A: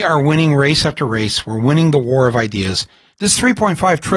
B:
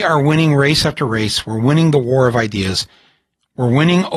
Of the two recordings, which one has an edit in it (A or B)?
A